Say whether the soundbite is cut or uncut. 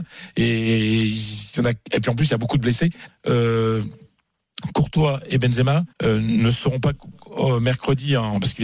cut